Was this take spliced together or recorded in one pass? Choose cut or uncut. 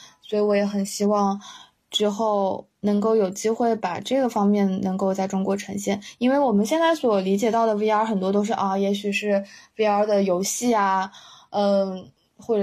uncut